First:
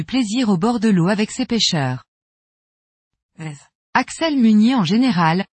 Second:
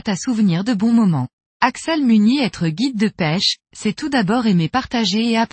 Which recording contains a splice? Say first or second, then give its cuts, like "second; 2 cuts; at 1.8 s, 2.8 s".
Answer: second; 1 cut; at 1.6 s